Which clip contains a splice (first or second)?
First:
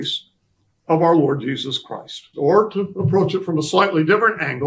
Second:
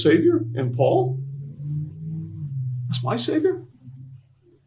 first